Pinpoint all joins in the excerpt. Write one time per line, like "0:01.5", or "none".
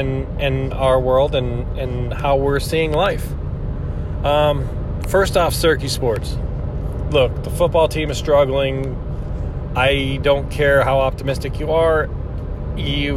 none

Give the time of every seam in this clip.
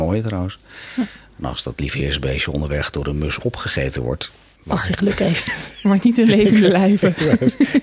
0:04.6

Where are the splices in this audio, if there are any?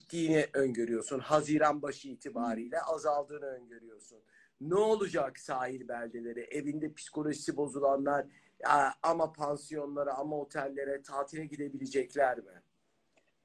none

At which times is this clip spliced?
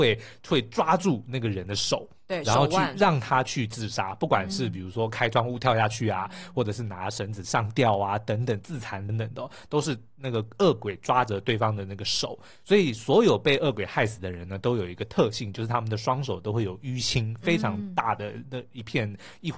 0:09.1

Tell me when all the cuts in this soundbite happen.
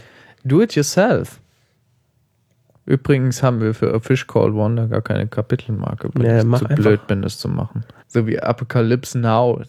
0:08.0

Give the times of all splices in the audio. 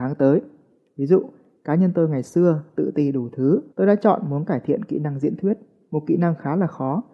0:03.7

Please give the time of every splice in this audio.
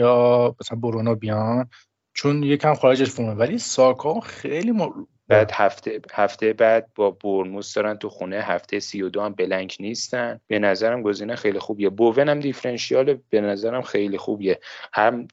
0:05.3
0:10.4

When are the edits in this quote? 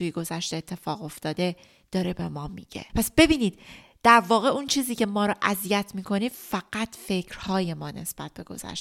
0:02.9

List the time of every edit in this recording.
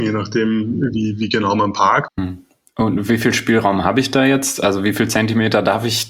0:02.1

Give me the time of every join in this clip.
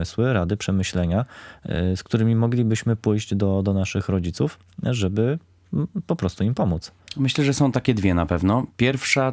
none

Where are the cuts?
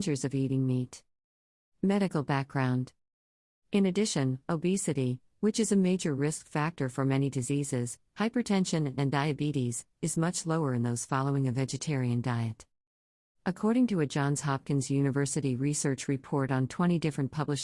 0:08.1

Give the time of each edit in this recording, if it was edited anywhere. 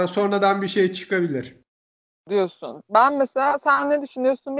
none

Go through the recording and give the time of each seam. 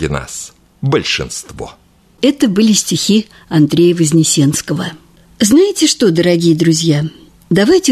none

